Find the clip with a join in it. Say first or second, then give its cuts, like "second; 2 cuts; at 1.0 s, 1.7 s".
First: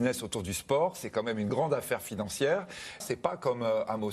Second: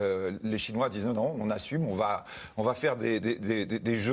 first; 2 cuts; at 1.5 s, 3.0 s